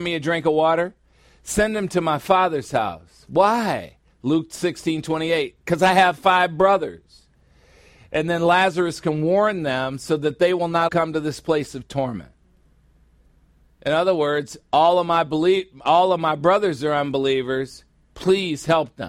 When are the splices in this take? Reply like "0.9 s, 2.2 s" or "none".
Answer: 10.9 s